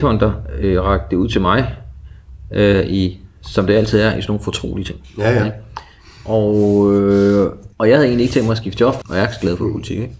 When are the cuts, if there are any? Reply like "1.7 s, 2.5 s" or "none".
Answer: 7.7 s, 9.0 s